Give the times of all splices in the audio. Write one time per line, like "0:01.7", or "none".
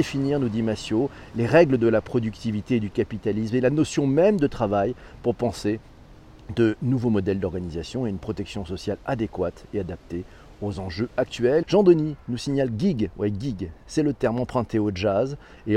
0:11.6
0:13.9